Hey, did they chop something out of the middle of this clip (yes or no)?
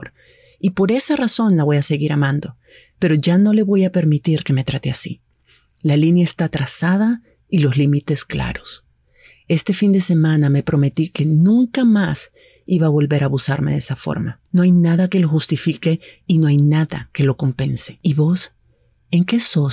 no